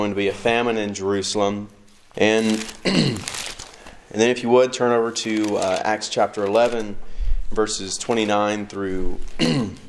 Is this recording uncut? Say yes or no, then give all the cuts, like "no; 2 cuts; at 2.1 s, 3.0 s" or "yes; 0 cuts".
no; 1 cut; at 2.1 s